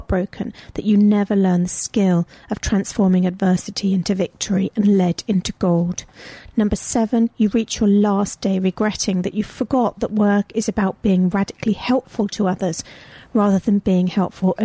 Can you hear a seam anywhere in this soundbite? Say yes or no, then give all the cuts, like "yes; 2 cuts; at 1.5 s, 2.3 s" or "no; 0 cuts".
no; 0 cuts